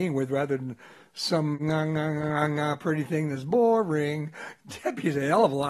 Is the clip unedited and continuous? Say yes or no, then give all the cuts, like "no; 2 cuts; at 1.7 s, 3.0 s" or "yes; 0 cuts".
yes; 0 cuts